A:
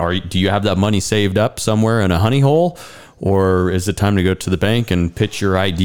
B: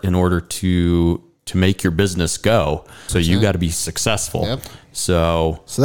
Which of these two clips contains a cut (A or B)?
B